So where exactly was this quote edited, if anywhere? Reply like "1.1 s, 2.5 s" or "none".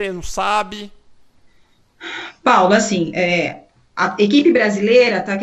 none